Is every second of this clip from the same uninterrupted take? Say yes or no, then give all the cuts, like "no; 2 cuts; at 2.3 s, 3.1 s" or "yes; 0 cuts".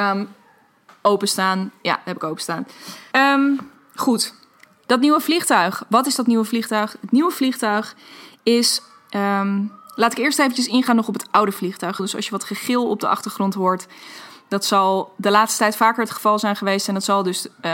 no; 2 cuts; at 3.1 s, 12.0 s